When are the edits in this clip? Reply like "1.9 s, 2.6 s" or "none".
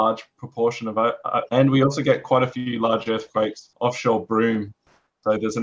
1.5 s, 3.7 s